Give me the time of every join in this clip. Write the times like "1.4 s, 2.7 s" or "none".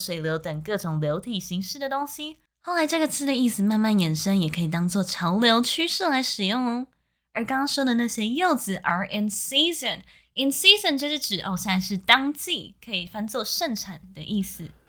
none